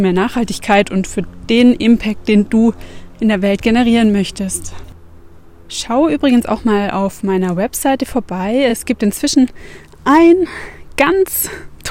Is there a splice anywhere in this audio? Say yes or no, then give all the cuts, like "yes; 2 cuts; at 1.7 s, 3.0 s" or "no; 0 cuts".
no; 0 cuts